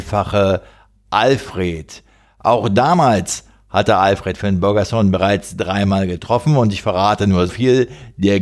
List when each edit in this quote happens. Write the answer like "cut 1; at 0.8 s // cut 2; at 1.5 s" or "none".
cut 1; at 7.5 s